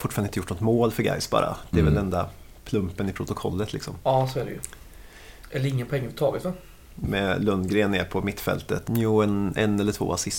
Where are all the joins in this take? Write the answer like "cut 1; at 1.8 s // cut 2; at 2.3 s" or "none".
cut 1; at 7.0 s // cut 2; at 8.9 s